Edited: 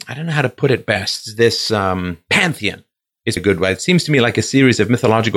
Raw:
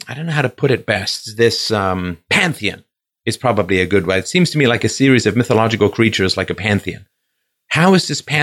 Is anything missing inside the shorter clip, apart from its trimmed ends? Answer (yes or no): yes